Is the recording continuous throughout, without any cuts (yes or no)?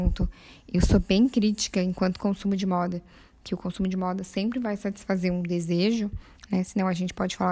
yes